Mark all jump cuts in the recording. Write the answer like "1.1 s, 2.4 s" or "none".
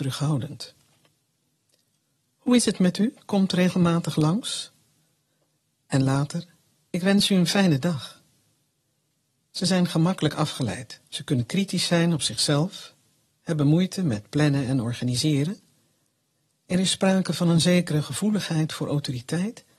11.0 s